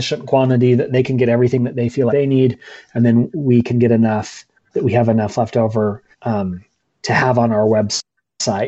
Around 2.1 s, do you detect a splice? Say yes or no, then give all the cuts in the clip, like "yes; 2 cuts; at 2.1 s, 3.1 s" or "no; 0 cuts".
yes; 2 cuts; at 2.1 s, 6.1 s